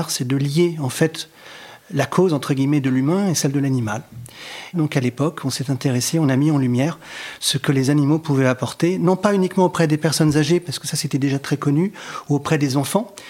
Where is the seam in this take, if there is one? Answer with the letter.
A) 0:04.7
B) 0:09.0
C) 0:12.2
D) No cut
A